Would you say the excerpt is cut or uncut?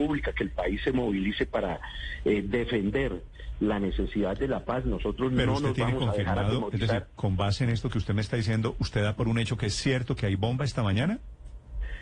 uncut